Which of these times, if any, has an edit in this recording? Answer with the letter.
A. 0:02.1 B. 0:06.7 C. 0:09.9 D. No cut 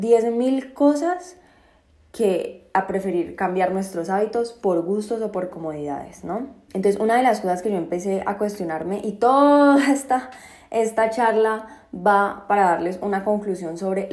B